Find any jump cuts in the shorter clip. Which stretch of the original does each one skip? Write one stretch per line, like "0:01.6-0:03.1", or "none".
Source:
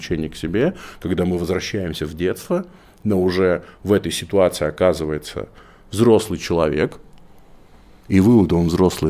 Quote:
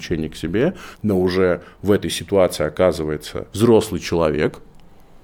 0:00.9-0:02.9
0:05.5-0:05.9

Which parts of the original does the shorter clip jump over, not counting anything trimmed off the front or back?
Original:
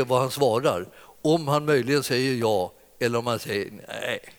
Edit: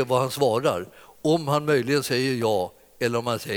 none

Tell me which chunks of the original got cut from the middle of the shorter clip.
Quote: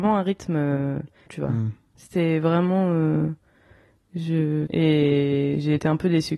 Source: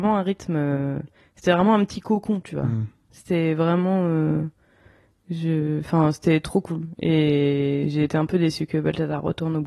0:01.3-0:02.4
0:05.8-0:07.0

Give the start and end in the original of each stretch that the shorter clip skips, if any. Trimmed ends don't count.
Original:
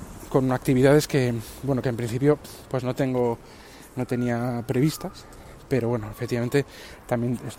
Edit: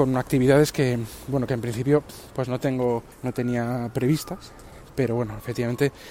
0:03.5-0:03.9

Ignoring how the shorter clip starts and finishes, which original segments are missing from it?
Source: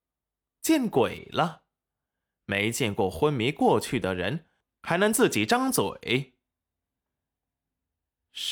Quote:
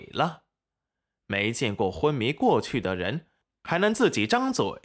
none

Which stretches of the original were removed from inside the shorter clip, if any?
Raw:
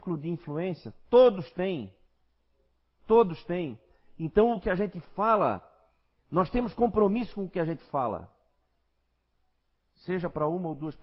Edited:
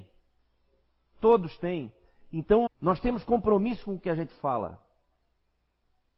0:04.5-0:06.2

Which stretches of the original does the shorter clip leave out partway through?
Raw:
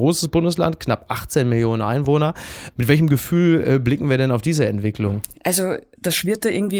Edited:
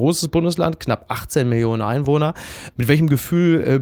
none

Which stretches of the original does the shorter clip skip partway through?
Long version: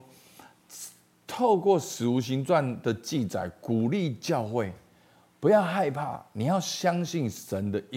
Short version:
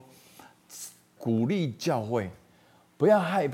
0:01.2-0:03.6

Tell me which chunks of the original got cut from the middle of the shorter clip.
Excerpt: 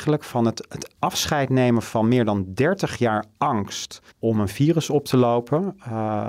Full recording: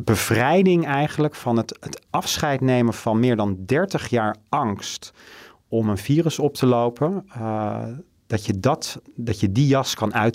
0:05.2-0:05.6

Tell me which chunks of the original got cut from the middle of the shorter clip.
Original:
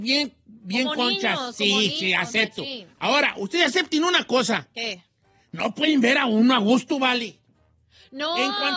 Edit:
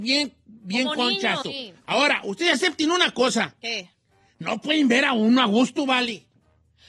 0:01.4-0:02.5

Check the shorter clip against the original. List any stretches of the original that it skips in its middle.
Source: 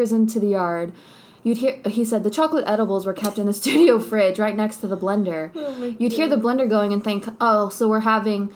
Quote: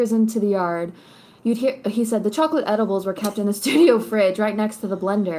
none

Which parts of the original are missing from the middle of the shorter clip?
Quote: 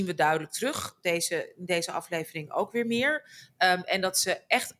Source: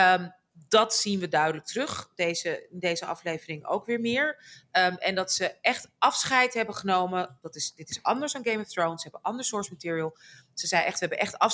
none

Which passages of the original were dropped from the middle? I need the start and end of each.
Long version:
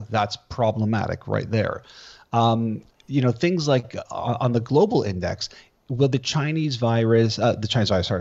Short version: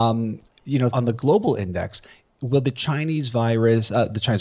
0:03.3-0:04.4

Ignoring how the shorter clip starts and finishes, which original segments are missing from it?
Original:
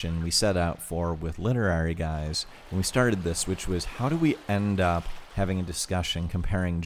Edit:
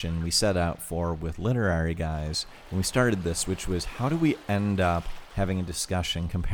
none

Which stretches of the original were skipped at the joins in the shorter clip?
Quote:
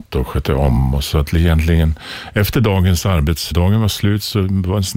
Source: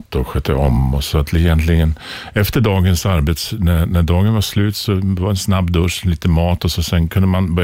0:03.5-0:04.0

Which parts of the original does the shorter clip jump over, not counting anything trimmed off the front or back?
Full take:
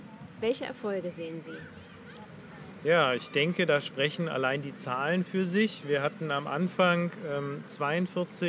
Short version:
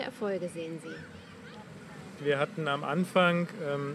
0:02.8-0:05.8

